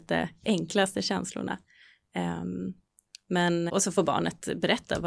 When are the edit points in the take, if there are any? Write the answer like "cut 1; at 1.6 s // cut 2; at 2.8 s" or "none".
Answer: cut 1; at 3.7 s